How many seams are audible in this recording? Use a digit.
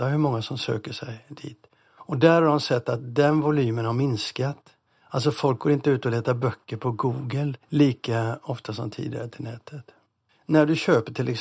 2